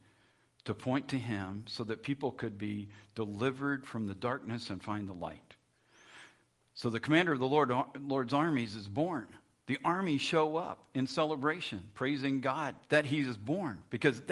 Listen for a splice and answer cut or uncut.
uncut